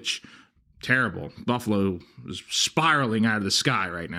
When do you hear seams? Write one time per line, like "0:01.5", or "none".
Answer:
0:02.4